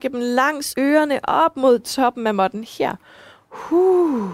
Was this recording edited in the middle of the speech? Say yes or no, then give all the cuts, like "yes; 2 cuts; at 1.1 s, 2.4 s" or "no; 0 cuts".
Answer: no; 0 cuts